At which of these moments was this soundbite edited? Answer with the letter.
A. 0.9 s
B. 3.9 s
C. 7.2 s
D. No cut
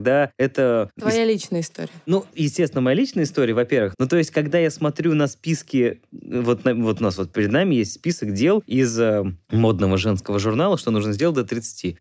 B